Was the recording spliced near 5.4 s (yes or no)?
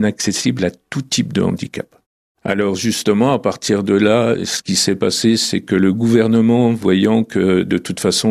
no